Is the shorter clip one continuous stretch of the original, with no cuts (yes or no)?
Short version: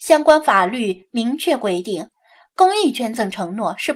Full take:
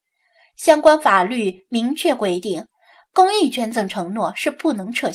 yes